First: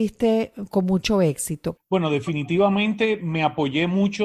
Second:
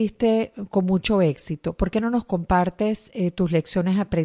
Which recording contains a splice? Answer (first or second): first